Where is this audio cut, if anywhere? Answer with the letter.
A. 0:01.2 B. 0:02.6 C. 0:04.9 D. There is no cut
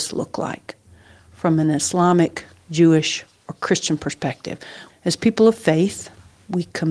C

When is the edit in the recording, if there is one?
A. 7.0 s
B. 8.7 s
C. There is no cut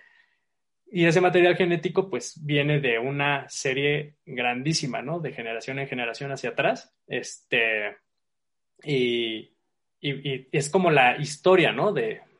A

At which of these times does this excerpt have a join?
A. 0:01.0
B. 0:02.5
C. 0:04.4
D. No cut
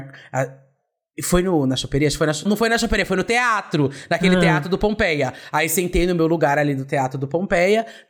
B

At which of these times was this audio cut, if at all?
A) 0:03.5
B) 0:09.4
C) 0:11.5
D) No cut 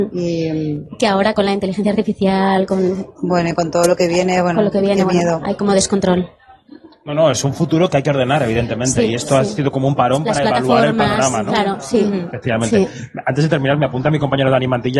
D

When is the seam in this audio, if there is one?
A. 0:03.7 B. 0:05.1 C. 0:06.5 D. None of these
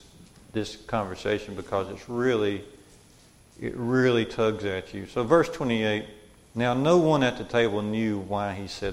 D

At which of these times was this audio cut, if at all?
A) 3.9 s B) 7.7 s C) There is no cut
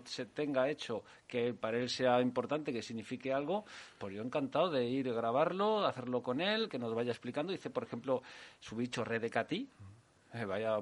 C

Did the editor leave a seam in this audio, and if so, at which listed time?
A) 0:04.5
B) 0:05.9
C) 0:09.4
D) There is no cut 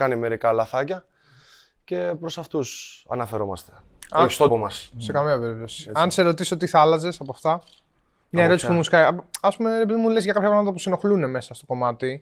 A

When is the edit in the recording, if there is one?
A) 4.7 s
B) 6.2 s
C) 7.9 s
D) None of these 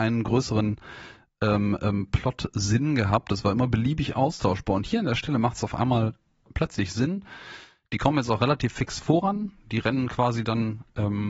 D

